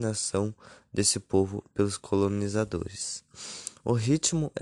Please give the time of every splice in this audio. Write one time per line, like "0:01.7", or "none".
none